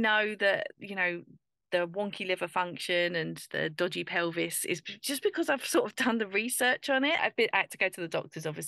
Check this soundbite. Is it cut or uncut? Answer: cut